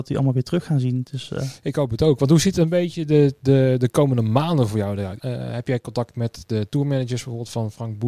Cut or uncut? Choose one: cut